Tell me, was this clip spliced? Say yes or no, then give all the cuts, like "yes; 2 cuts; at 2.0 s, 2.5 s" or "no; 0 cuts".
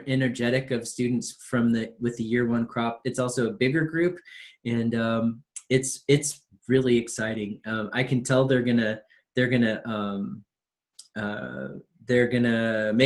no; 0 cuts